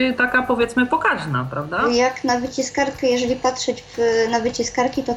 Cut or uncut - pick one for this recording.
uncut